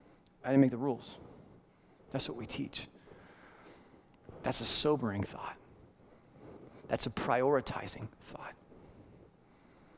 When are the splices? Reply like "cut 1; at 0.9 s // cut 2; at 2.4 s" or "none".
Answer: cut 1; at 2.0 s